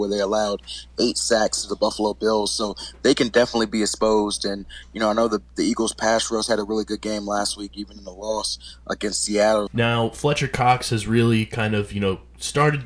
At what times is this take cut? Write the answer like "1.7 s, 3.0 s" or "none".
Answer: 9.7 s